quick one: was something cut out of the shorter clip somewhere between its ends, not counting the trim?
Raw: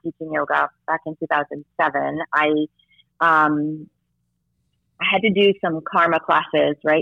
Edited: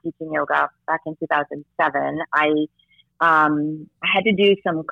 yes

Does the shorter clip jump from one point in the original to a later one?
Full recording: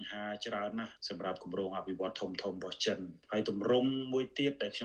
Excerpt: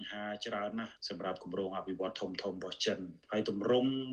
no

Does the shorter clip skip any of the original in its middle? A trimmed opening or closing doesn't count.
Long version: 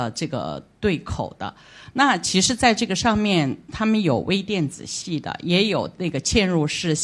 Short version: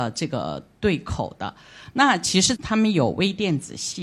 yes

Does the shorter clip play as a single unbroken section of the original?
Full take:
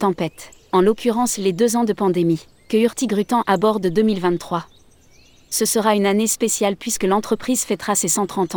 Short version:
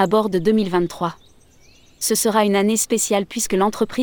yes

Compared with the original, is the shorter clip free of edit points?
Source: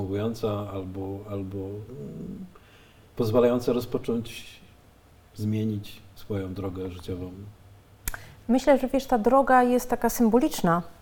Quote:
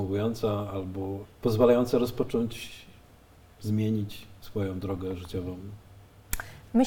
no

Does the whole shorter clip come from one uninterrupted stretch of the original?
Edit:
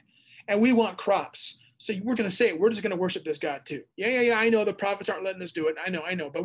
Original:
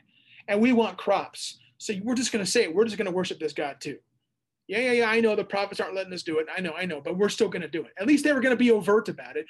no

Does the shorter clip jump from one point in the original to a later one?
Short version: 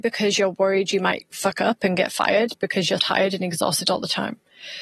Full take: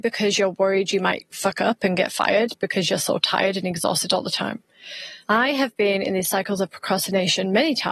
yes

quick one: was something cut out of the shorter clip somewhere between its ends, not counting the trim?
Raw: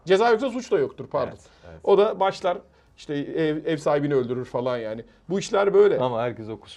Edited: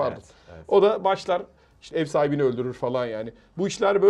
yes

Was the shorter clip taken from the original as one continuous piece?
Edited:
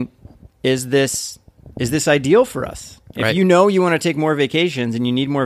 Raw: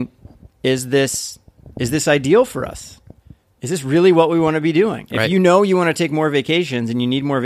no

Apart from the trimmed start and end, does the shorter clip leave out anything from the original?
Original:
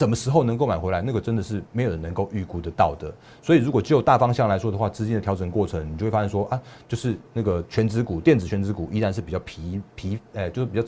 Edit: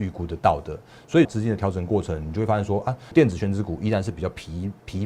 yes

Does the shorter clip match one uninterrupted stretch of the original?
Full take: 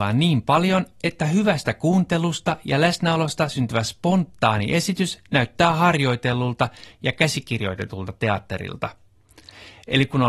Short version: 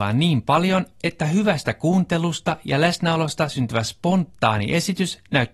yes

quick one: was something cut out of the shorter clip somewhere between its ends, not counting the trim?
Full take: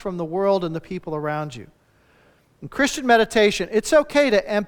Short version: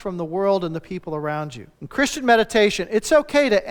yes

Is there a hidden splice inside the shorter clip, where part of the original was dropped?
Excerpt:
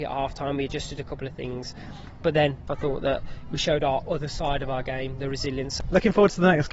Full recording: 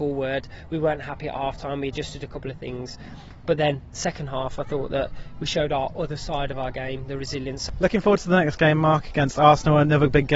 yes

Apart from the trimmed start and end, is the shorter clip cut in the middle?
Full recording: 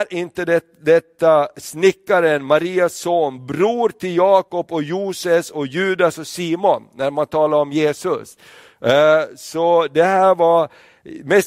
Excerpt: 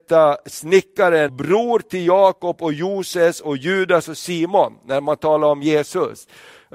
yes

